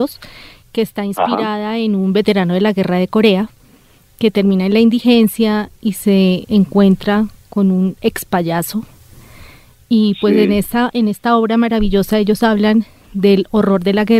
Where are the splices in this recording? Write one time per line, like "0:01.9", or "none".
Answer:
none